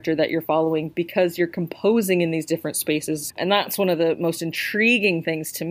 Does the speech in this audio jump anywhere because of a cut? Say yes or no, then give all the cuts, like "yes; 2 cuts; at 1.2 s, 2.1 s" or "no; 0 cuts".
yes; 1 cut; at 3.3 s